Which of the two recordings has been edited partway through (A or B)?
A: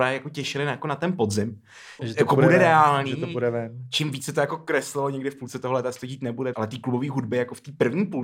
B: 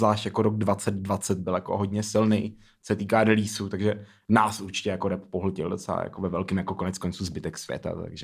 A